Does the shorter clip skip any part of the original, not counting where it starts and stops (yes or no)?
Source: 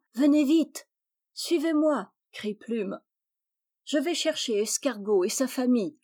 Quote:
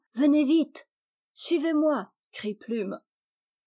no